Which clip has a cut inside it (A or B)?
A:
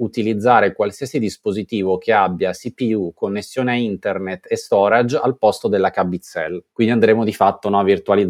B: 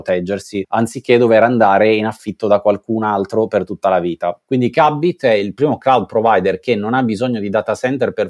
B